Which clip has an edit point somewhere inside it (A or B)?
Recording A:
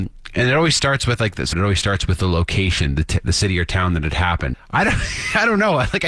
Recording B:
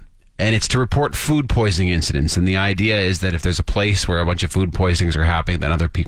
A